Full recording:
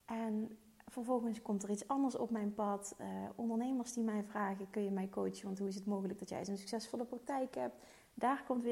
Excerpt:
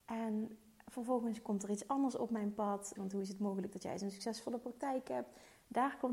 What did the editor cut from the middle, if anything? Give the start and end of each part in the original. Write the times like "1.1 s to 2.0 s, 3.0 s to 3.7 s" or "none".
3.0 s to 5.4 s